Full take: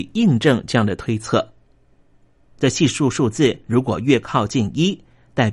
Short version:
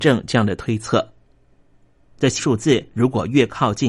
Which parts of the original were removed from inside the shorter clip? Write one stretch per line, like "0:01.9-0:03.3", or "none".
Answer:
0:02.8-0:03.1